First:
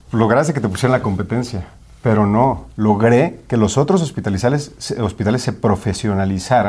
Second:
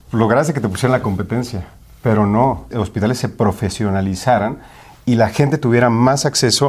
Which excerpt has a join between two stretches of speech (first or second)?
second